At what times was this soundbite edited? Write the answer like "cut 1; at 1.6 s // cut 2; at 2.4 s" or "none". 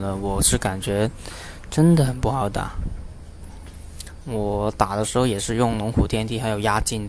cut 1; at 4.2 s